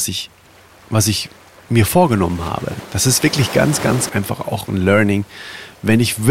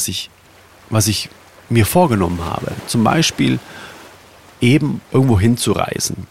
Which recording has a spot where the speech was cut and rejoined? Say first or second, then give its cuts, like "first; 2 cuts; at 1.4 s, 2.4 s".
first; 2 cuts; at 2.9 s, 4.1 s